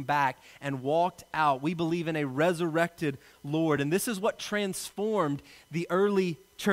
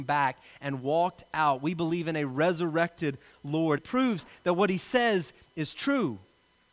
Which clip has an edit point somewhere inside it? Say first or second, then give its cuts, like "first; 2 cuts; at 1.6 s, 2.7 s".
second; 1 cut; at 3.8 s